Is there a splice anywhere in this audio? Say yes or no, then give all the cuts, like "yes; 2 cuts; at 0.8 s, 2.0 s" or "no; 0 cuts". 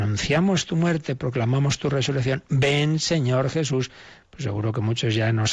no; 0 cuts